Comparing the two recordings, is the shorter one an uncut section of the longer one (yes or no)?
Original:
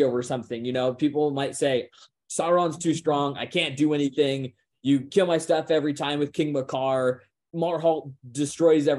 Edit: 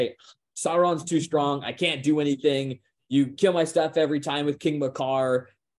yes